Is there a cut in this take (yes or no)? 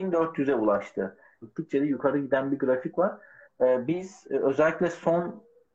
yes